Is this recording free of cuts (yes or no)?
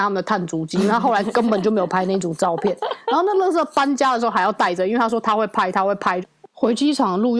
no